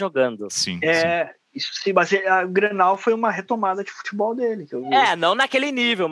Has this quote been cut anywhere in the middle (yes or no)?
no